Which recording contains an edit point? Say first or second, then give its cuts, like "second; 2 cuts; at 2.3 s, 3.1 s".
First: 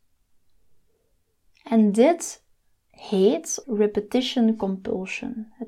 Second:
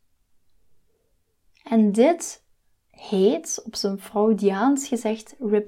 first; 1 cut; at 3.6 s